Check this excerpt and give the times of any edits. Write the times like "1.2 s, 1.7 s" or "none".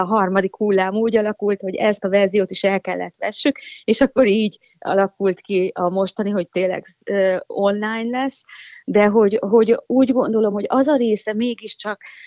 none